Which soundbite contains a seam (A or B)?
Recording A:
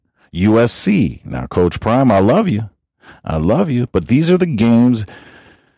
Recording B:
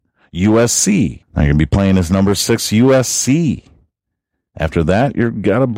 B